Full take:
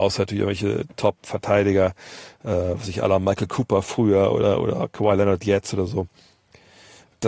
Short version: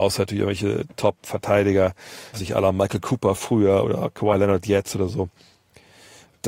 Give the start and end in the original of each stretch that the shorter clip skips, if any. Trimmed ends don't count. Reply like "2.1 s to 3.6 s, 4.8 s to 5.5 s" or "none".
2.3 s to 2.8 s, 4.3 s to 4.6 s